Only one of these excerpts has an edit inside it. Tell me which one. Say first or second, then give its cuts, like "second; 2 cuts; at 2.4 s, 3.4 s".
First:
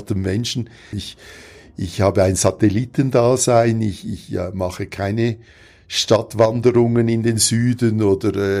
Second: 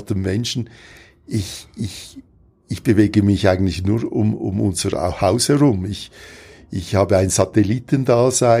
first; 1 cut; at 0.9 s